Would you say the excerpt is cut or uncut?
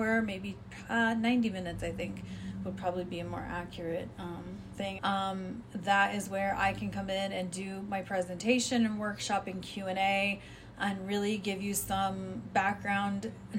cut